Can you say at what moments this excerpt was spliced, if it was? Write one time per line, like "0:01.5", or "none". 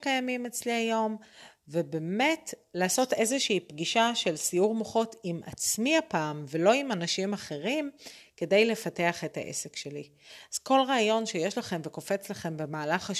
none